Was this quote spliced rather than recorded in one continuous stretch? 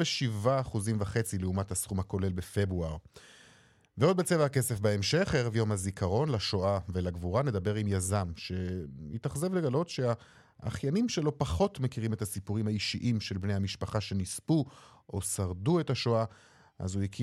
no; 0 cuts

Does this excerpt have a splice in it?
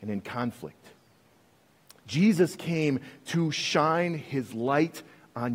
no; 0 cuts

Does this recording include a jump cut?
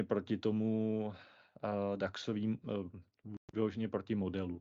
no; 0 cuts

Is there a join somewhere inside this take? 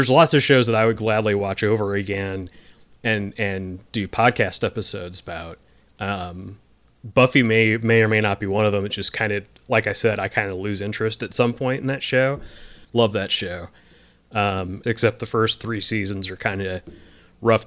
yes; 2 cuts; at 12.8 s, 14.8 s

